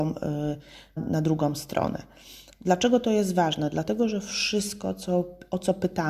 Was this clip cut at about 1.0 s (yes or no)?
yes